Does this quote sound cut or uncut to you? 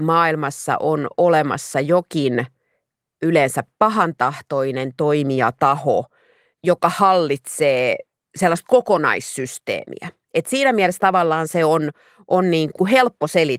uncut